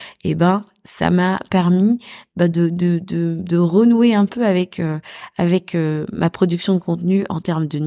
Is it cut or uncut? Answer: uncut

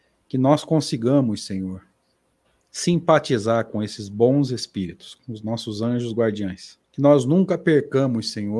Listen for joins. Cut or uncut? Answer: cut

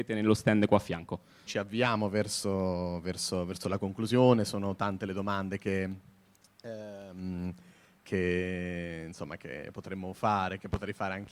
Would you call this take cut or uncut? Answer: cut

